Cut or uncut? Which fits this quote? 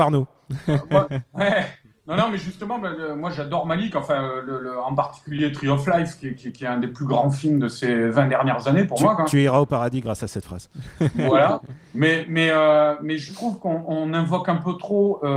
uncut